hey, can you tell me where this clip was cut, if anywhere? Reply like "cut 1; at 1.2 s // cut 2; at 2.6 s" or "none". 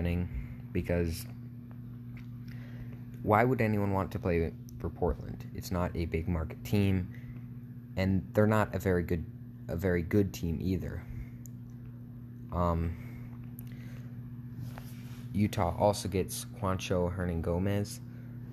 none